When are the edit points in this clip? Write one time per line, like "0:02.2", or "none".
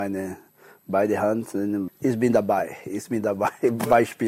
0:01.9